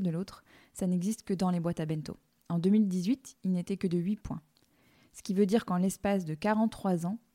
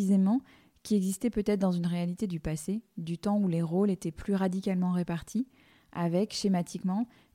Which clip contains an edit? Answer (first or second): first